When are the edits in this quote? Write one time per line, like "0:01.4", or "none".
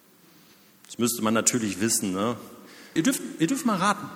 0:03.0